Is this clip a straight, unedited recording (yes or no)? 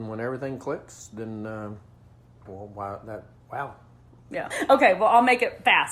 no